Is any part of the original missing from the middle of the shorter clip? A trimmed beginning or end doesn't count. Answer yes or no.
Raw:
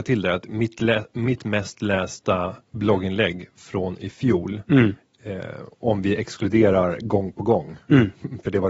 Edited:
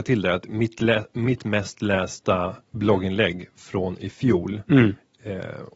no